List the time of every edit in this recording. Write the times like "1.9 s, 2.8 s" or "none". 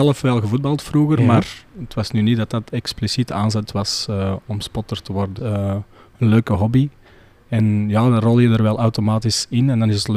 5.4 s